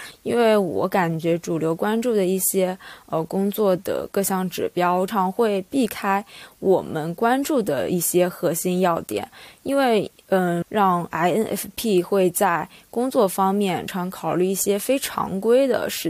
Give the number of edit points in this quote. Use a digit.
3